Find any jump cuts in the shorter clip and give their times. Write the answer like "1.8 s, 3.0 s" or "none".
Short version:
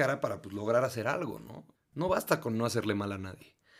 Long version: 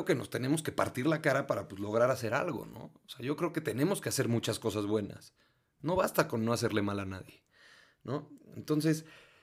1.7 s